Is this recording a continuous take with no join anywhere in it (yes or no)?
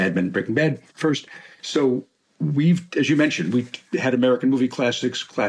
no